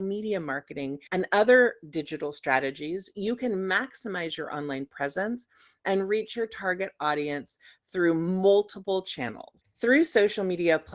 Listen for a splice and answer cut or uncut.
cut